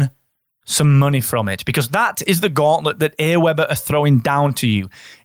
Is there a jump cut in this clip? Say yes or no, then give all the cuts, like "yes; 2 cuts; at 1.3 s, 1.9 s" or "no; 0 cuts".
no; 0 cuts